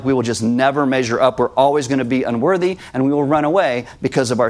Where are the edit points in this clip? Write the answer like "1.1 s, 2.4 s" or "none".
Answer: none